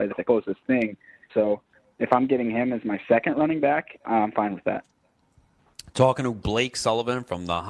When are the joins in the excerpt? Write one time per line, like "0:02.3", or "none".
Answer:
0:01.3

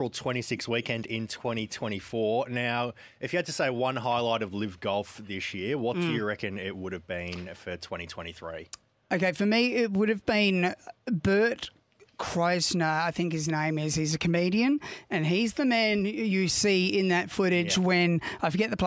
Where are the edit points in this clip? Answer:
none

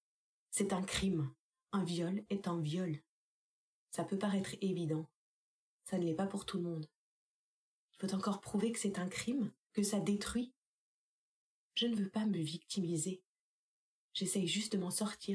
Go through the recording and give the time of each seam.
0:09.7

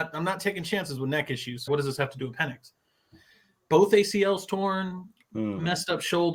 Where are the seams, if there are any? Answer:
0:01.7

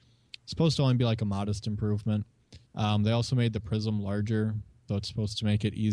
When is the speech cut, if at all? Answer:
0:02.7
0:04.9

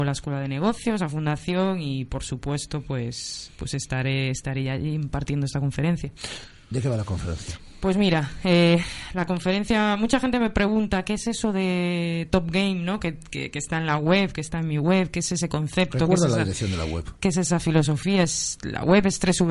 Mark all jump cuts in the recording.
none

